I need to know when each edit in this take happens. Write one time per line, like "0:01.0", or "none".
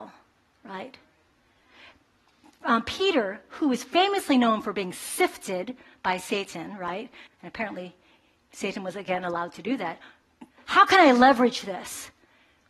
0:07.3
0:10.5